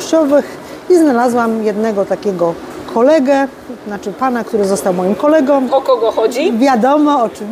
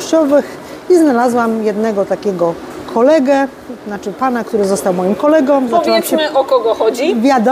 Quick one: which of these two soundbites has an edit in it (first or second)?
first